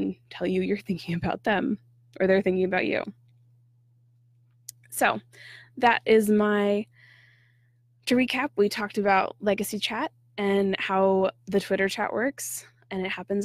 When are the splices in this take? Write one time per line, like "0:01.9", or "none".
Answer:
none